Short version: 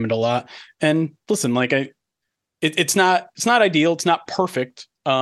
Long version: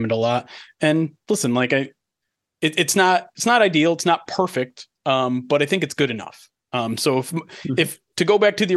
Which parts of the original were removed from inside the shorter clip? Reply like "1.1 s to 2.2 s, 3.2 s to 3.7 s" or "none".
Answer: none